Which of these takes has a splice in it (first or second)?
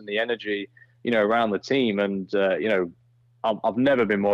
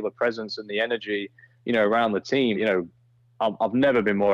second